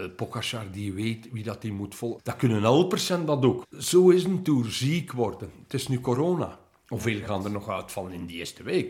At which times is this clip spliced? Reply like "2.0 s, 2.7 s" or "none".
2.2 s, 3.6 s